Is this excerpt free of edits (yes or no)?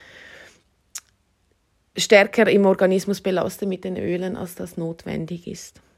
yes